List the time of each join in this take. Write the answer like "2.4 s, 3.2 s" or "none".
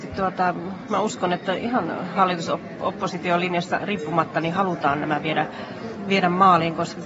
none